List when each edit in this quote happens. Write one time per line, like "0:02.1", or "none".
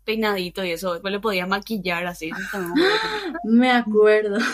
0:01.0